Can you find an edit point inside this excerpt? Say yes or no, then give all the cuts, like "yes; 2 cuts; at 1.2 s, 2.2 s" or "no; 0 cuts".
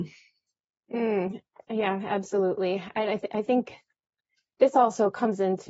no; 0 cuts